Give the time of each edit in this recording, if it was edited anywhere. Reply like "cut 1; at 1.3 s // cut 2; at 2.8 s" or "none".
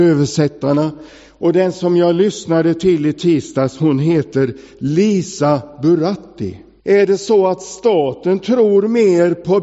cut 1; at 6.8 s

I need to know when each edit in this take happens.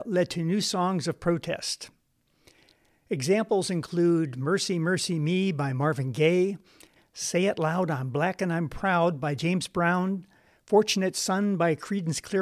cut 1; at 7.0 s

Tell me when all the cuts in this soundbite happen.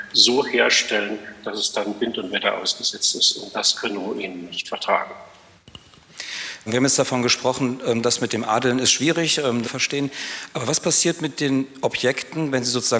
cut 1; at 6.7 s // cut 2; at 9.6 s

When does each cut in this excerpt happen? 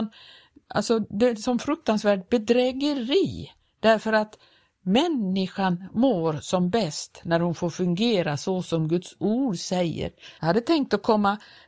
cut 1; at 10.4 s

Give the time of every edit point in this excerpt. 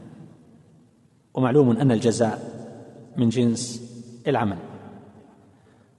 cut 1; at 4.2 s

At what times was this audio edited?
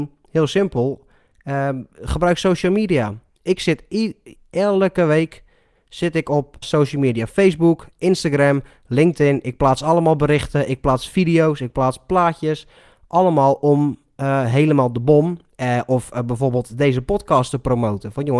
cut 1; at 6.6 s

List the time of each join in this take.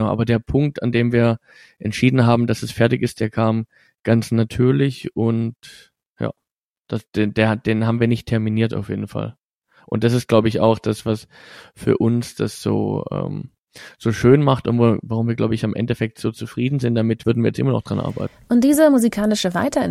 cut 1; at 17.2 s

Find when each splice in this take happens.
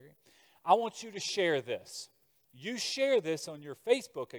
none

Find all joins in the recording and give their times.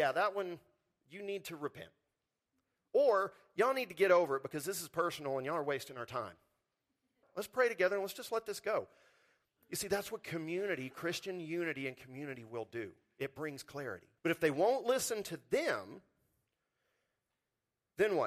cut 1; at 7.2 s // cut 2; at 14.2 s

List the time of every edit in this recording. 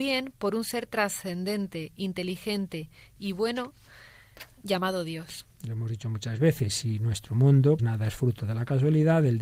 cut 1; at 5.5 s // cut 2; at 7.8 s

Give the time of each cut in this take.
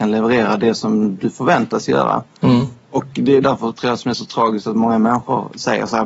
cut 1; at 3.4 s

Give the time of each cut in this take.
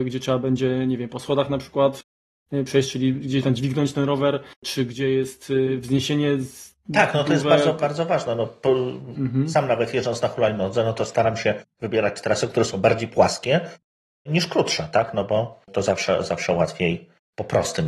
cut 1; at 4.5 s // cut 2; at 15.6 s

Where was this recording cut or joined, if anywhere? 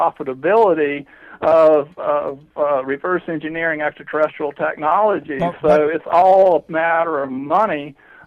none

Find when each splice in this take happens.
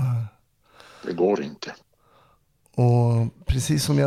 none

